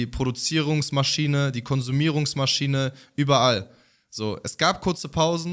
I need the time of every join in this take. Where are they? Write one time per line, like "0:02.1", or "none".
none